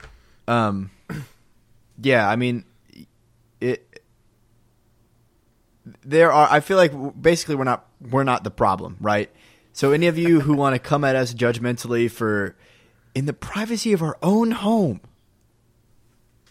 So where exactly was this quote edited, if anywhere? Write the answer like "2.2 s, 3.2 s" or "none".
none